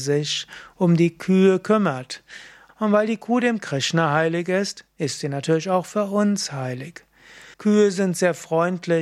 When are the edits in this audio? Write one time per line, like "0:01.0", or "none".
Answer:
0:02.7
0:07.5